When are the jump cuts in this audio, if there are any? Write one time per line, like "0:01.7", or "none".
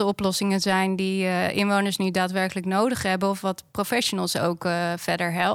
none